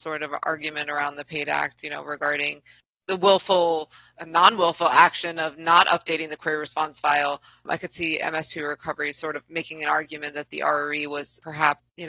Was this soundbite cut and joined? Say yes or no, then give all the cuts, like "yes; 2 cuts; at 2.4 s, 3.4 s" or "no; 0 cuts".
no; 0 cuts